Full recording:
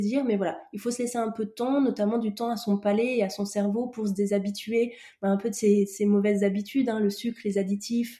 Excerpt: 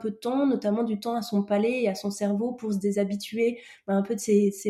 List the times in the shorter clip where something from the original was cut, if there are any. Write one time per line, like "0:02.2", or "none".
none

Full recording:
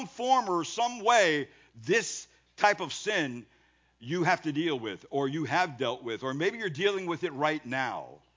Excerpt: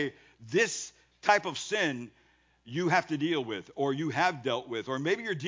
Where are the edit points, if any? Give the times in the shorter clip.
none

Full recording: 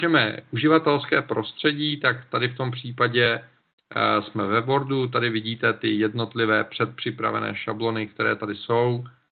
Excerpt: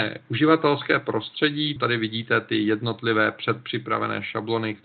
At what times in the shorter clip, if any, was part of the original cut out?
0:01.8

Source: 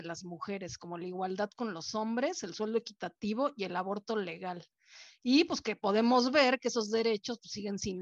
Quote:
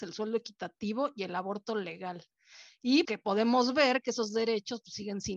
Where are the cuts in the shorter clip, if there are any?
0:03.0

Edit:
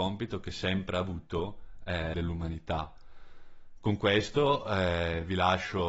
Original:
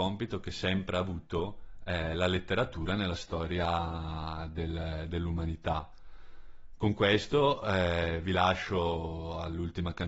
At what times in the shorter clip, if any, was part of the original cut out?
0:02.1

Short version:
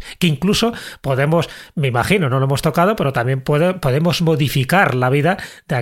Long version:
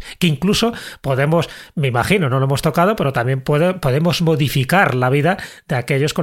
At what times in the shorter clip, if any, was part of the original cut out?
none

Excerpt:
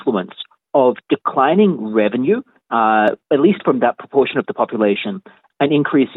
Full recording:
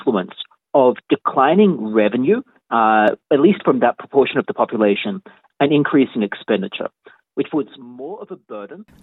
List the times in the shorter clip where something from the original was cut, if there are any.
none

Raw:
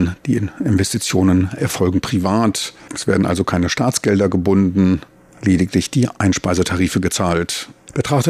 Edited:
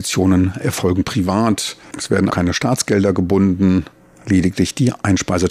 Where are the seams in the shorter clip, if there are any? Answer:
0:02.3

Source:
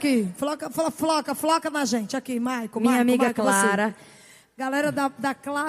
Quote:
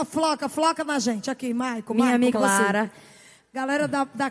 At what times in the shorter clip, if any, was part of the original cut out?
0:02.3

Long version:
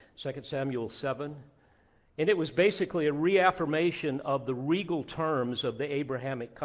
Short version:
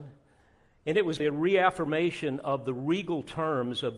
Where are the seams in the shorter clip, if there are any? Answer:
0:01.2

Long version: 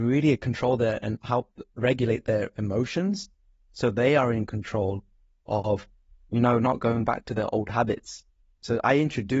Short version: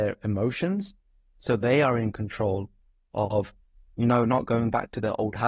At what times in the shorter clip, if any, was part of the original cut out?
none

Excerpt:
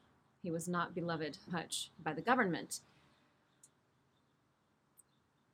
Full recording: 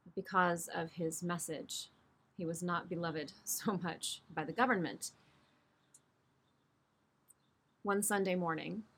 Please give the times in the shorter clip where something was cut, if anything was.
0:01.5

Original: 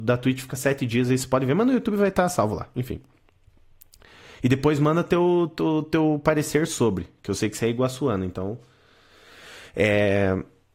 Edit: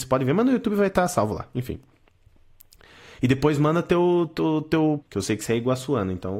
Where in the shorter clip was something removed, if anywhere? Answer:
0:05.0

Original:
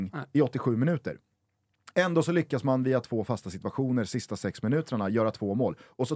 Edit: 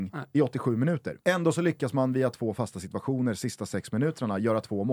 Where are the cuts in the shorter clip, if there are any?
0:01.2

